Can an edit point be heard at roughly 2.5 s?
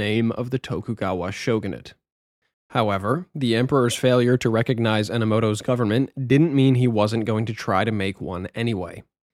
yes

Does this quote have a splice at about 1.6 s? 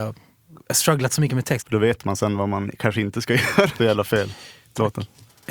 yes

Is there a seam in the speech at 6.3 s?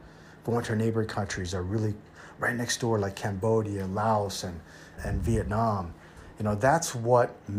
no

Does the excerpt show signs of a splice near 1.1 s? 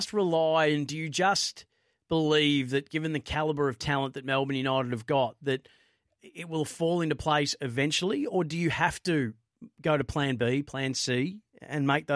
no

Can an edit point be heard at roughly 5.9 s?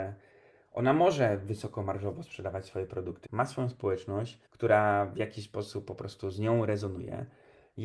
no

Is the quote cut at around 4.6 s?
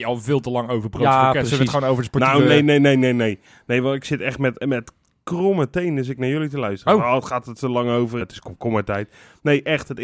yes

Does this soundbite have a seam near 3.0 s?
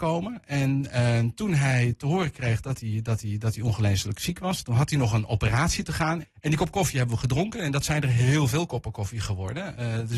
no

